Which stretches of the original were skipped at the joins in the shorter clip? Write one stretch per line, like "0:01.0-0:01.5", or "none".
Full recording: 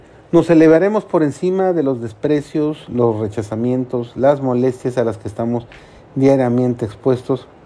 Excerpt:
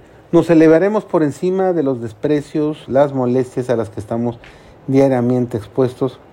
0:02.9-0:04.1